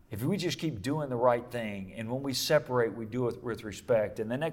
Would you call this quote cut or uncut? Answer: uncut